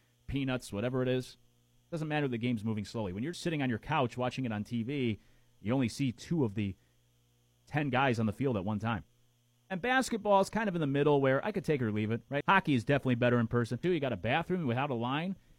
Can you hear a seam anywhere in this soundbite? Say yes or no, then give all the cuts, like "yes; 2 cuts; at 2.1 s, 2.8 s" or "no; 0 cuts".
yes; 3 cuts; at 3.3 s, 12.4 s, 13.8 s